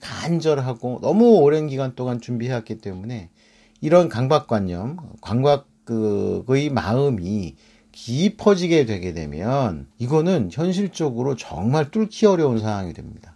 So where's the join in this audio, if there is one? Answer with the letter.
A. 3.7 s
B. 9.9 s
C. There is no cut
B